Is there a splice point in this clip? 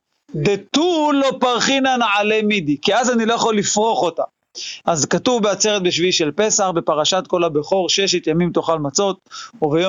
yes; 1 cut; at 4.8 s

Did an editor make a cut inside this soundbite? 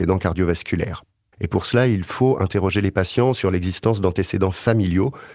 yes; 1 cut; at 1.3 s

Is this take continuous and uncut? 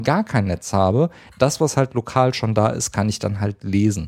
yes; 0 cuts

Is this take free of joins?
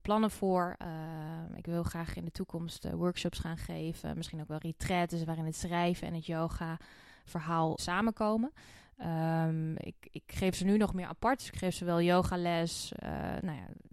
no; 1 cut; at 7.8 s

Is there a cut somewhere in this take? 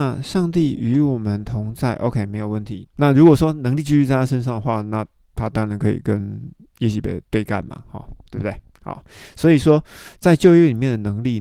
yes; 2 cuts; at 2.9 s, 7.3 s

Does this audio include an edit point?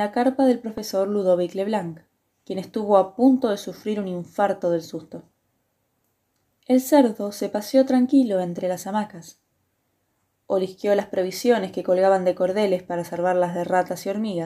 yes; 1 cut; at 6.6 s

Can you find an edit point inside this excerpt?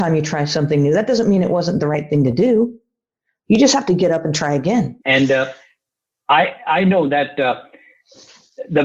yes; 1 cut; at 5.0 s

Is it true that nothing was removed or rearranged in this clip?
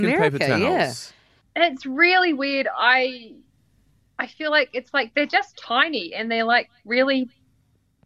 yes; 0 cuts

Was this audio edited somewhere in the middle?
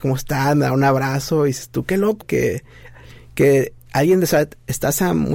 yes; 1 cut; at 2.2 s

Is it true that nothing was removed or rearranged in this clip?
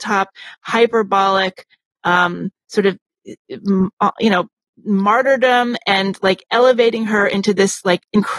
yes; 0 cuts

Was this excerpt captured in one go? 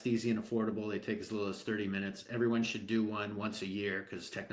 yes; 0 cuts

